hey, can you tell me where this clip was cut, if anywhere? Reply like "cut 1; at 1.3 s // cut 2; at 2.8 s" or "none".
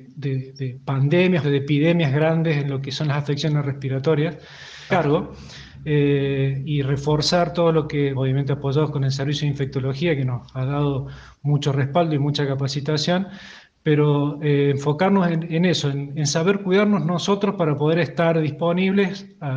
cut 1; at 1.4 s // cut 2; at 4.9 s // cut 3; at 8.1 s